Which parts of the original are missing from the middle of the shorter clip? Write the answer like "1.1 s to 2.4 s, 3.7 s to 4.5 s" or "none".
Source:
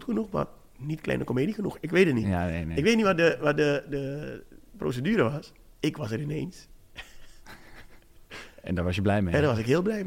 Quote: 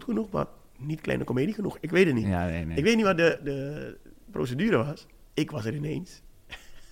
3.4 s to 3.8 s